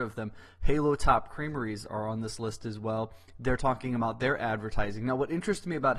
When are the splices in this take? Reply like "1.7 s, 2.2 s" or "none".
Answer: 1.9 s